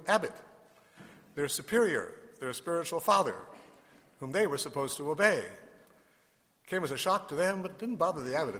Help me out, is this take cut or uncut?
uncut